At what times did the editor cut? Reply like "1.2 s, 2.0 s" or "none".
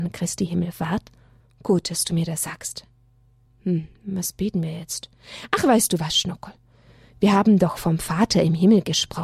1.4 s, 3.5 s